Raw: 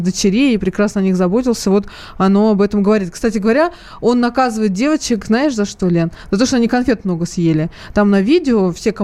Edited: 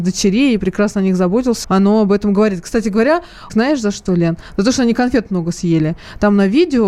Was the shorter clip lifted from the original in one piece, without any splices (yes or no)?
no